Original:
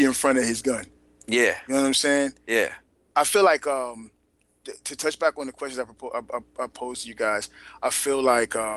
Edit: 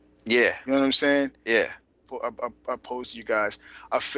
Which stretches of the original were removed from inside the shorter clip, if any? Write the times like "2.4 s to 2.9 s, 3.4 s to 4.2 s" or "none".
3.0 s to 5.9 s